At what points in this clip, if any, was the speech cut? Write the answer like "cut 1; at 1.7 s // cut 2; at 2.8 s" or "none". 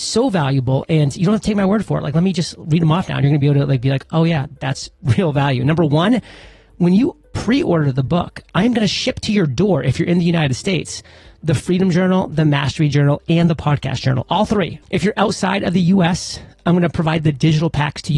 cut 1; at 14.8 s